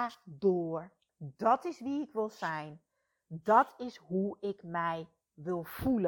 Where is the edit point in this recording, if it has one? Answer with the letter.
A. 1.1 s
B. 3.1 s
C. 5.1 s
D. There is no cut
A